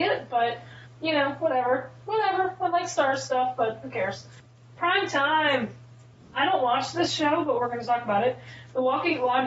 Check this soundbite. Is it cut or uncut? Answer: uncut